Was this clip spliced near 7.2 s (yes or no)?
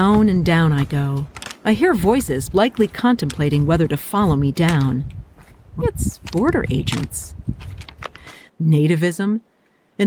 no